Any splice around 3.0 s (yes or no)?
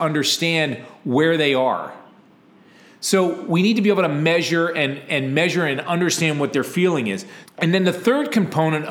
no